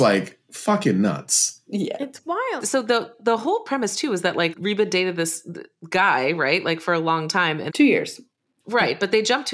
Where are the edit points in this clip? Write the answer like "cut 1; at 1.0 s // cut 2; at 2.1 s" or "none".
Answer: cut 1; at 4.5 s // cut 2; at 7.7 s